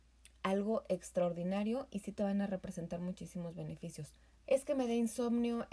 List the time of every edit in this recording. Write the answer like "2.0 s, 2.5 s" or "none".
4.4 s